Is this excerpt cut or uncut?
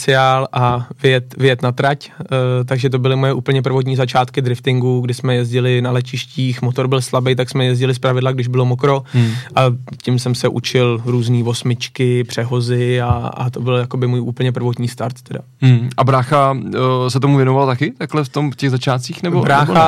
uncut